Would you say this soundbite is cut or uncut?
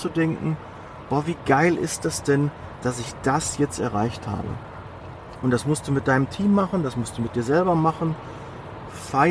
uncut